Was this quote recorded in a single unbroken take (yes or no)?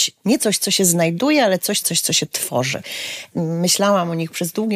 no